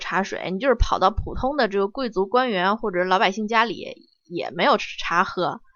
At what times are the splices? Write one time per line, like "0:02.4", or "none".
0:04.8